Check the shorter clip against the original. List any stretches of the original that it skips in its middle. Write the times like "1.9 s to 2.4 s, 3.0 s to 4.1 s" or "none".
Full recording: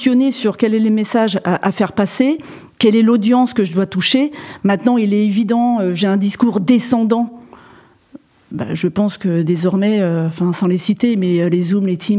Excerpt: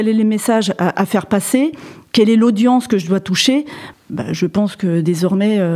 4.6 s to 8.4 s